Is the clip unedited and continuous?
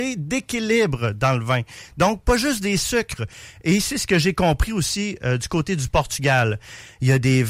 yes; 0 cuts

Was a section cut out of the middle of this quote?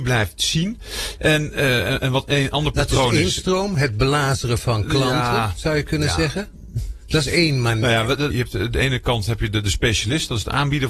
yes; 1 cut; at 8.3 s

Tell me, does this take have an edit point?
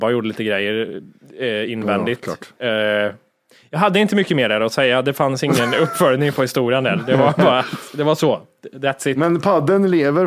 no; 0 cuts

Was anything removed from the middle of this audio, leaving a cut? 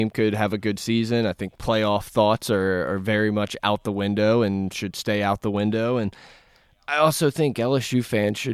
no; 0 cuts

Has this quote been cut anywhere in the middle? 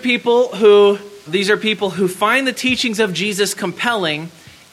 yes; 1 cut; at 1.3 s

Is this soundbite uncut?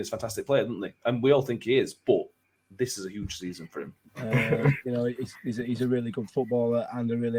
no; 1 cut; at 4.1 s

